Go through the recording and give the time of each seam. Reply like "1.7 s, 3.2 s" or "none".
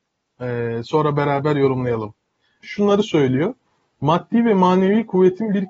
2.6 s